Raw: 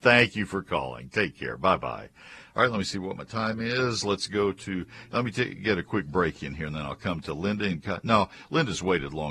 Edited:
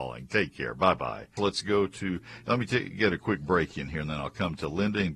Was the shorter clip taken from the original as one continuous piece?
no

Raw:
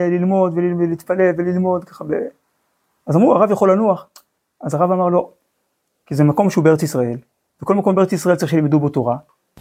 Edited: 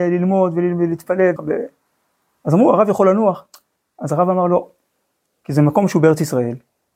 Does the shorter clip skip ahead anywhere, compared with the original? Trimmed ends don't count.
yes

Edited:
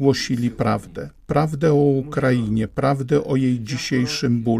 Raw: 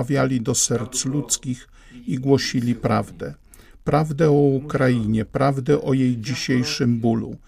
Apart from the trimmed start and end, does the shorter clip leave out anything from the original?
yes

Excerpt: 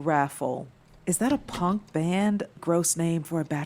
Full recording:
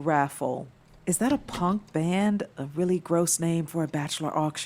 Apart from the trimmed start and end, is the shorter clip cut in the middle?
yes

